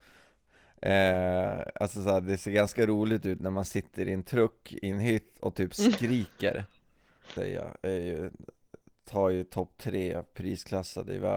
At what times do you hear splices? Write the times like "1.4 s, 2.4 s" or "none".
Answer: 7.4 s